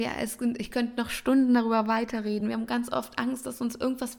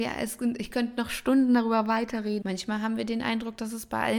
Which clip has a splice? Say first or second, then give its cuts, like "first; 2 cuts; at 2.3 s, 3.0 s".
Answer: second; 1 cut; at 2.4 s